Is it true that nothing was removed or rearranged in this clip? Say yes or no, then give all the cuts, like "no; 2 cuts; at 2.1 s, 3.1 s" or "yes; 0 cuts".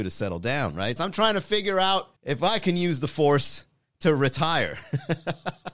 no; 2 cuts; at 1.0 s, 2.2 s